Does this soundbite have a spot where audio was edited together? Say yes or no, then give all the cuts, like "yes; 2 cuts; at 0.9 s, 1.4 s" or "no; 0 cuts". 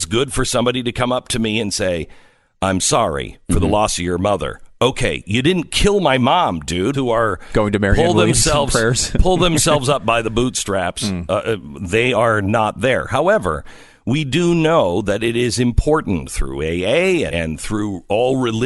yes; 2 cuts; at 6.9 s, 17.3 s